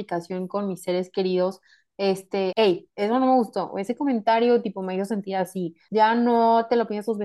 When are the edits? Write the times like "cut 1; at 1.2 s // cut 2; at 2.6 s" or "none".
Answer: cut 1; at 2.5 s // cut 2; at 5.9 s